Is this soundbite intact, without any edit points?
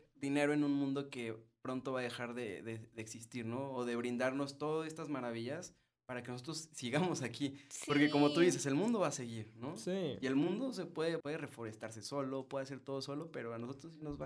no; 1 cut; at 11.2 s

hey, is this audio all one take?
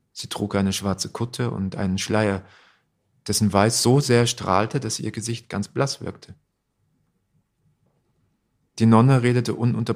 yes; 0 cuts

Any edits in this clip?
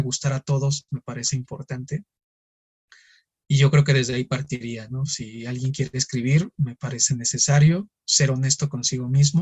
no; 0 cuts

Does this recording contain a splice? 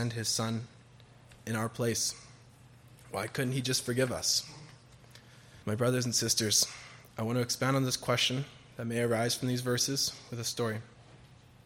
yes; 1 cut; at 5.6 s

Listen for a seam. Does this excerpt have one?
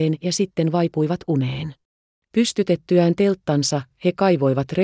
yes; 1 cut; at 2.2 s

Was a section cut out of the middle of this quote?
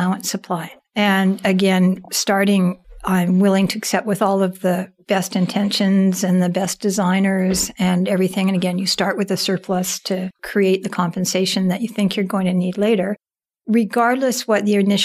no; 0 cuts

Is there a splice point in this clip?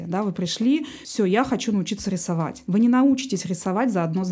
no; 0 cuts

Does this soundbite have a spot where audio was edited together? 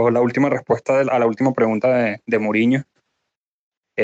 no; 0 cuts

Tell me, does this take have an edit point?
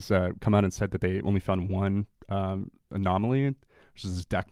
no; 0 cuts

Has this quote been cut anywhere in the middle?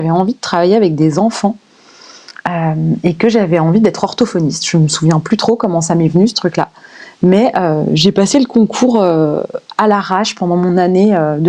no; 0 cuts

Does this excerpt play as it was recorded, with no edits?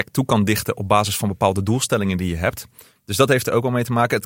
no; 1 cut; at 3.0 s

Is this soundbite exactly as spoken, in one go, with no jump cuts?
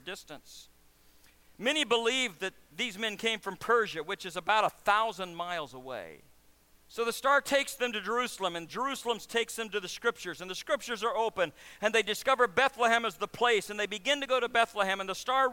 no; 1 cut; at 6.7 s

